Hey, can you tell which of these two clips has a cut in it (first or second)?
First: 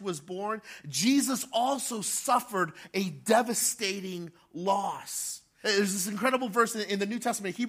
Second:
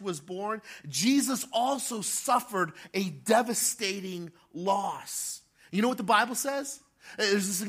first